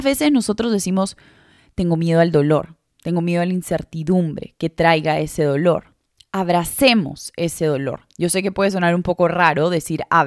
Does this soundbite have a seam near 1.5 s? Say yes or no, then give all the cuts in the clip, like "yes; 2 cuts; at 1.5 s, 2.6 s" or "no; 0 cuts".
no; 0 cuts